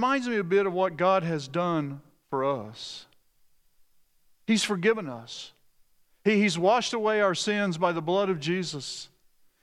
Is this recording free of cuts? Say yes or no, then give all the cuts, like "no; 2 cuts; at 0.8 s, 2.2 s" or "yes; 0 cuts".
yes; 0 cuts